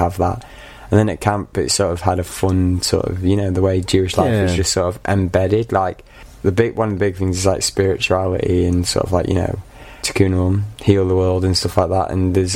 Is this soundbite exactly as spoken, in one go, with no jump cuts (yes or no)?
yes